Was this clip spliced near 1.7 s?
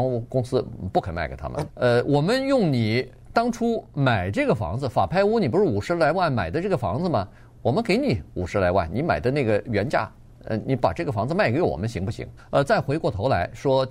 yes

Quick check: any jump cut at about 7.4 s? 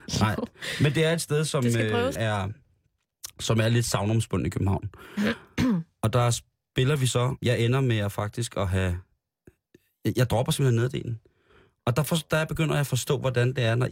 yes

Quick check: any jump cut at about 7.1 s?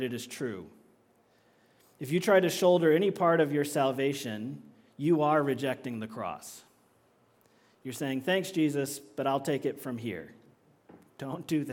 no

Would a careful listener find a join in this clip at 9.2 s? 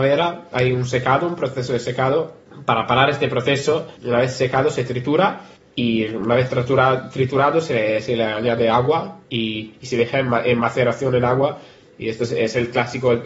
yes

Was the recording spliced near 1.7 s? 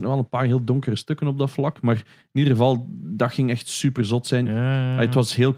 no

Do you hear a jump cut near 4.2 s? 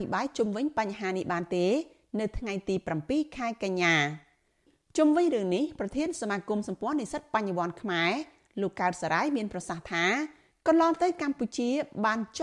no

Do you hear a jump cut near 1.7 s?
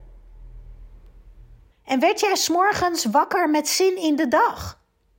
yes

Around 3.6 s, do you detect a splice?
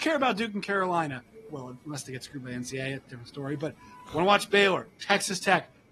no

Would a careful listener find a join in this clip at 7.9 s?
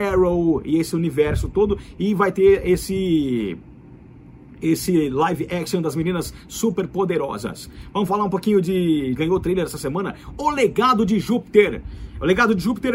no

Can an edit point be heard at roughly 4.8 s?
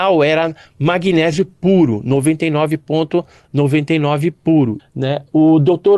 yes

